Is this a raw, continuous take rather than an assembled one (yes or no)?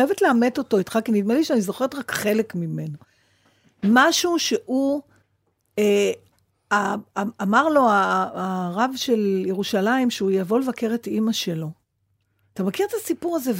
yes